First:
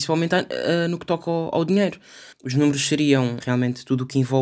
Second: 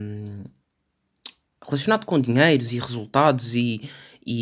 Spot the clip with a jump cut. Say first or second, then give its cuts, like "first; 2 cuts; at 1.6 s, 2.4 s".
first; 2 cuts; at 2.3 s, 3.4 s